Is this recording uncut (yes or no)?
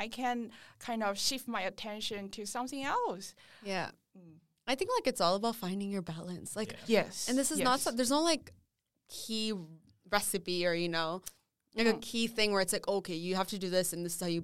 yes